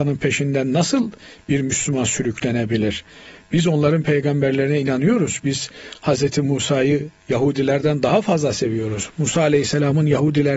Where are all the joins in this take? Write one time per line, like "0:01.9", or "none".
none